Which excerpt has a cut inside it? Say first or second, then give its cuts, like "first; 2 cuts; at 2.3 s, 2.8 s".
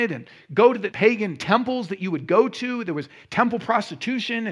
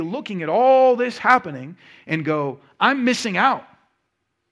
first; 1 cut; at 0.9 s